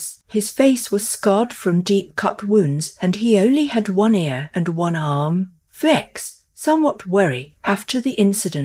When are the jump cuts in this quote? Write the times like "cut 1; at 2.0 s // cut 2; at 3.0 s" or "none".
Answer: cut 1; at 5.7 s